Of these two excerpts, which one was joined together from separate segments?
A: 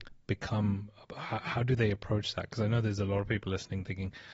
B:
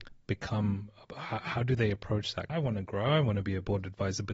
B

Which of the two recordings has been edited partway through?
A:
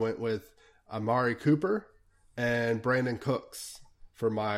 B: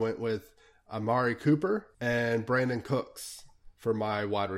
B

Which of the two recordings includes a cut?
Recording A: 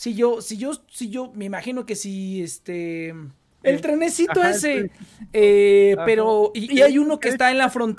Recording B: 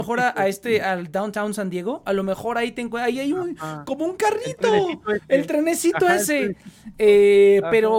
A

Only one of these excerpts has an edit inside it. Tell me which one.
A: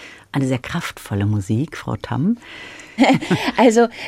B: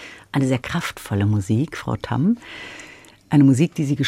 A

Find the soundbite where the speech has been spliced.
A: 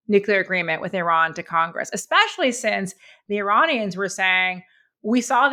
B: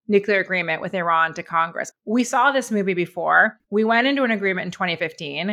B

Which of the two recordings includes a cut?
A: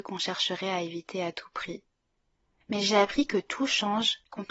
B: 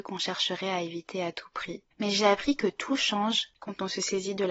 B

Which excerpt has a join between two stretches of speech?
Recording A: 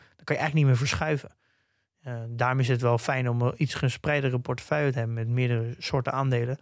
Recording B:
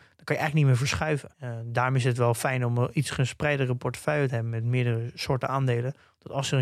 B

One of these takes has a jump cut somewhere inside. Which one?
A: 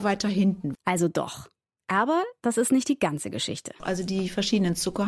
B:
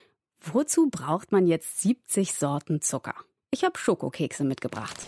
B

